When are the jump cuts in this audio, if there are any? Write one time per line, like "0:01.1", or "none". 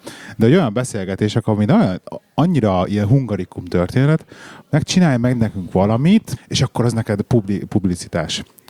0:04.6
0:06.4